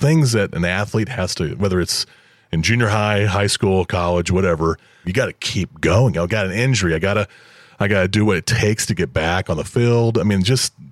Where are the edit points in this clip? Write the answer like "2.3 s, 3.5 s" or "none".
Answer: 5.0 s, 6.1 s